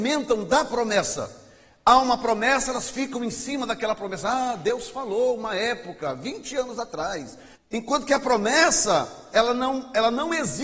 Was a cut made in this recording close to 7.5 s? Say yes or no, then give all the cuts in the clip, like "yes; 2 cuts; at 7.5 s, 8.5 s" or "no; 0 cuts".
yes; 2 cuts; at 7.5 s, 9.3 s